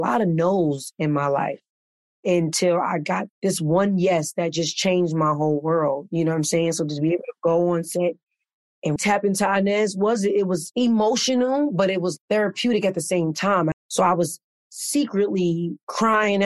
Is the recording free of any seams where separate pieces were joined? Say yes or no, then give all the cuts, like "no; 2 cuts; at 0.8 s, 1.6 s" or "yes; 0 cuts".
no; 2 cuts; at 9.0 s, 13.7 s